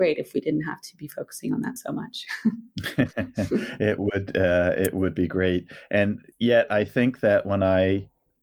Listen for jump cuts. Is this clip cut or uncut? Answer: uncut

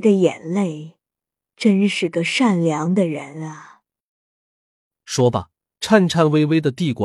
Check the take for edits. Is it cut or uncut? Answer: uncut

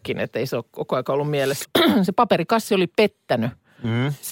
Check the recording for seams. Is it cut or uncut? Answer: cut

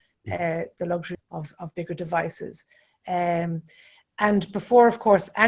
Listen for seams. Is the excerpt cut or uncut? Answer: cut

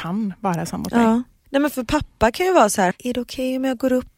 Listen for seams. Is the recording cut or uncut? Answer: cut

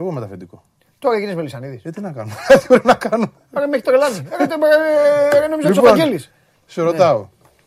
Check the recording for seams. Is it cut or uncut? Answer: uncut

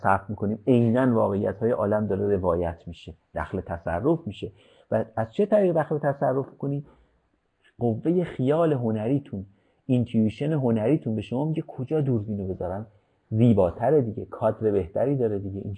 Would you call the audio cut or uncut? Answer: uncut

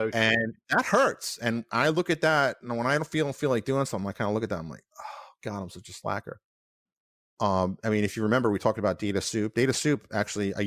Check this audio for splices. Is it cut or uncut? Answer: uncut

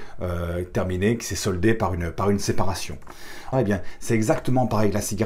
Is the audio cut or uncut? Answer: cut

